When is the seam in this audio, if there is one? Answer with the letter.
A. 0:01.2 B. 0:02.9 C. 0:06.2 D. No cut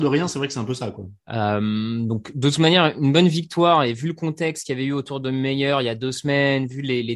A